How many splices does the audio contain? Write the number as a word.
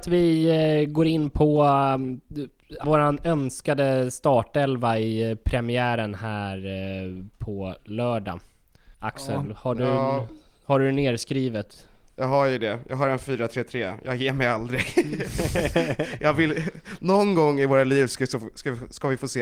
two